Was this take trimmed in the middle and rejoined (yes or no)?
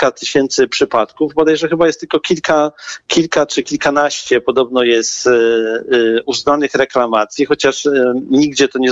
no